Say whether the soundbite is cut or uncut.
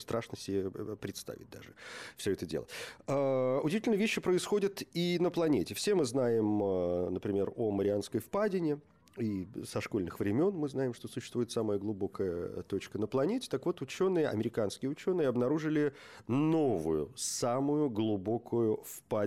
uncut